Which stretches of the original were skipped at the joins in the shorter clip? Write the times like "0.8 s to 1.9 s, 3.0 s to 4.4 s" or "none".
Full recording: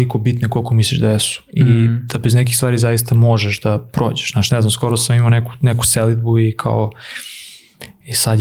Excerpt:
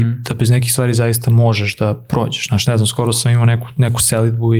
none